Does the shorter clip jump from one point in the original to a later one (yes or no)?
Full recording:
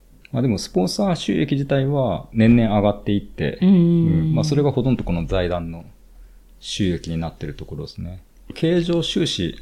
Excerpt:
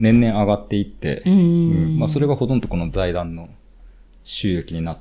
no